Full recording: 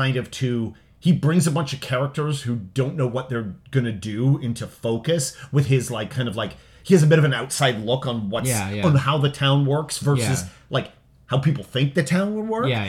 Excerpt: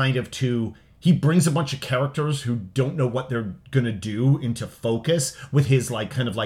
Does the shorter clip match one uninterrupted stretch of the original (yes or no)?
yes